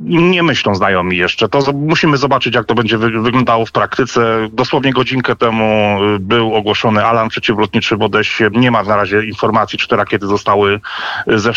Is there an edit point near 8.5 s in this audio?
yes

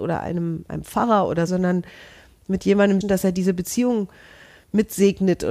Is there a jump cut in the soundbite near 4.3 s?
no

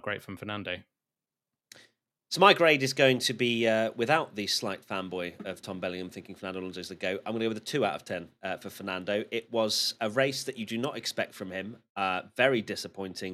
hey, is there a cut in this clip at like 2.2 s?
no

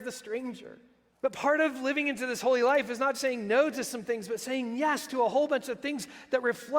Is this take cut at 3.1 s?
yes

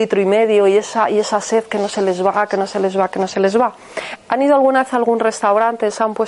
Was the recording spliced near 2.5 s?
no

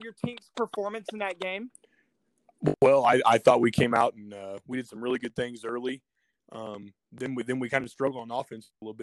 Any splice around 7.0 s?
yes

